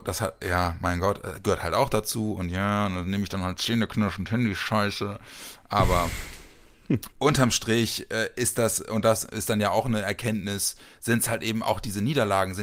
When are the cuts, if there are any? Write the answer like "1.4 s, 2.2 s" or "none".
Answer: 7.1 s